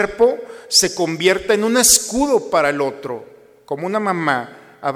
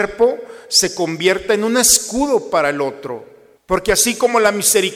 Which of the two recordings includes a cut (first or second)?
second